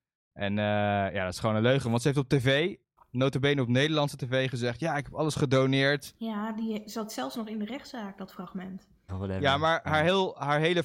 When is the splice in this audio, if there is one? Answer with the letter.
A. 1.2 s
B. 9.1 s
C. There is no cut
B